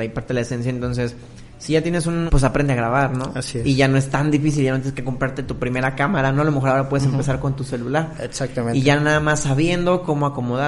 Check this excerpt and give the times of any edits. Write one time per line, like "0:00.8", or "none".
0:02.3